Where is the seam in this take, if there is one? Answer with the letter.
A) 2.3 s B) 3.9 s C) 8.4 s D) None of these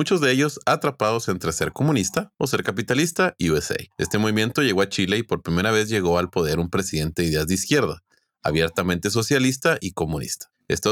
A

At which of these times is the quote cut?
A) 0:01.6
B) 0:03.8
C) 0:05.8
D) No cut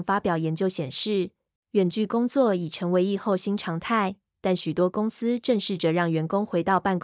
A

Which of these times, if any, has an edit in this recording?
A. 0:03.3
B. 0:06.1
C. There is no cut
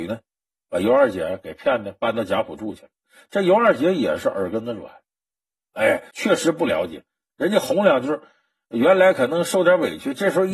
B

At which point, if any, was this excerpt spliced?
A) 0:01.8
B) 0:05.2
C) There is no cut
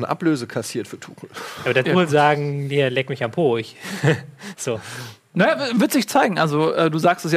A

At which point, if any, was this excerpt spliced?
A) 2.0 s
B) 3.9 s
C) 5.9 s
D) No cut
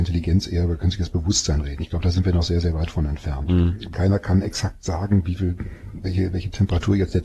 B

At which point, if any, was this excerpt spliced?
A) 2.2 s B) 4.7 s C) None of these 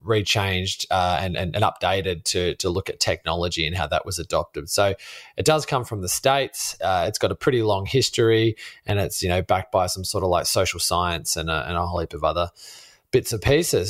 C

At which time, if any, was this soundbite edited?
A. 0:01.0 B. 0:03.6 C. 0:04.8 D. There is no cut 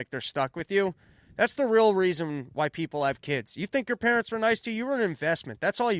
D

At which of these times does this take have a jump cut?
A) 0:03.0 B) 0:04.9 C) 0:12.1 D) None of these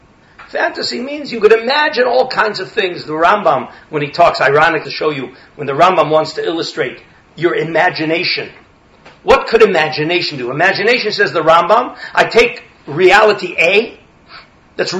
B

